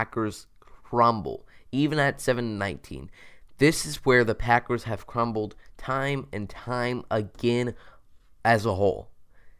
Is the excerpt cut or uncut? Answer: uncut